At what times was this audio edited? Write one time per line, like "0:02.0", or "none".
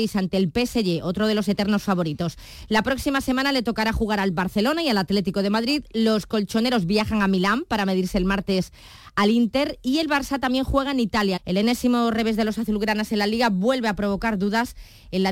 0:11.4